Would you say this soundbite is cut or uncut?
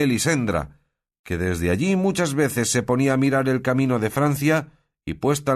uncut